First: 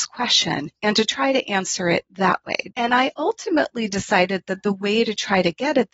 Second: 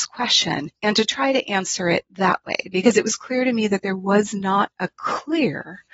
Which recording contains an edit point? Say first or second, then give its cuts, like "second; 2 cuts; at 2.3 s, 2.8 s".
first; 1 cut; at 2.7 s